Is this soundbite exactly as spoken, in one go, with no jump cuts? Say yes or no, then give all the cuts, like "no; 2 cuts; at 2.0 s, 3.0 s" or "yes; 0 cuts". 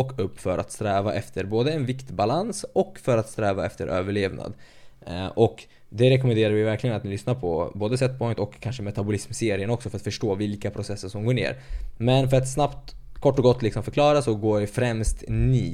yes; 0 cuts